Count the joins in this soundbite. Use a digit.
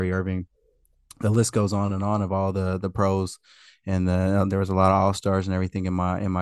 0